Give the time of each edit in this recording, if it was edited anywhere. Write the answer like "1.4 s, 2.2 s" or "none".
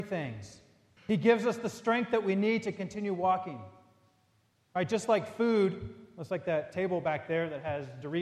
1.0 s